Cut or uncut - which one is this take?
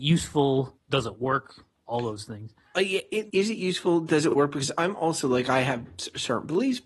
cut